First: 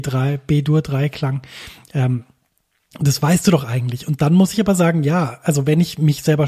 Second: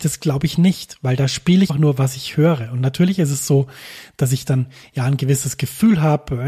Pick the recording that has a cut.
second; 1 cut; at 1.7 s

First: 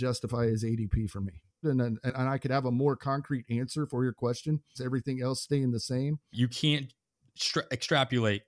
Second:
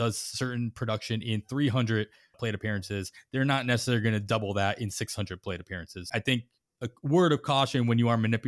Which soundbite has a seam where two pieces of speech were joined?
first; 3 cuts; at 1.6 s, 4.7 s, 6.3 s

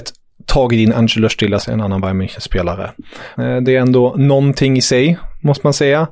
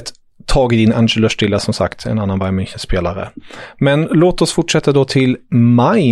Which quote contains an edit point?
first; 2 cuts; at 1.6 s, 3.4 s

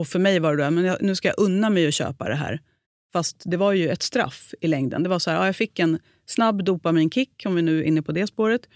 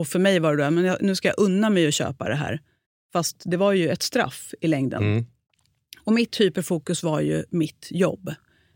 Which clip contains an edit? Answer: second; 1 cut; at 5.0 s

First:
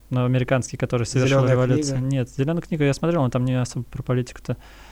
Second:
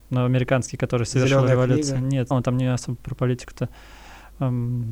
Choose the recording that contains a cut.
second; 1 cut; at 2.3 s

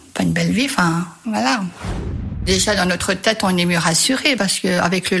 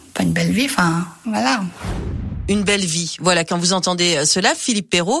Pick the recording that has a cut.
first; 1 cut; at 2.4 s

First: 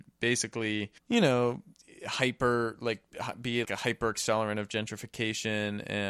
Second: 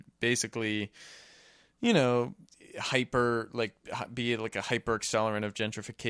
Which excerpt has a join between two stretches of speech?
first; 2 cuts; at 1.0 s, 3.6 s

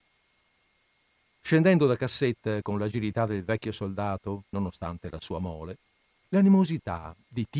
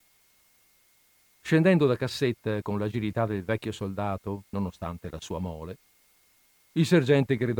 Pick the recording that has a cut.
first; 1 cut; at 6.2 s

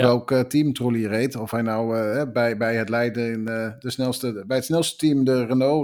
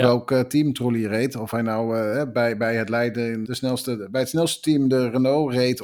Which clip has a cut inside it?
second; 1 cut; at 3.4 s

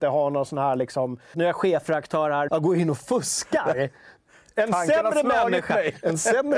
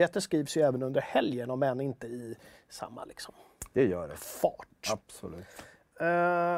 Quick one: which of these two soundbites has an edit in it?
first; 2 cuts; at 1.3 s, 2.5 s

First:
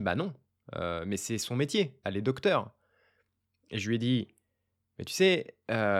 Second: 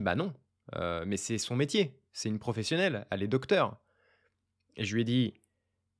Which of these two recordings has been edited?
first; 1 cut; at 2.0 s

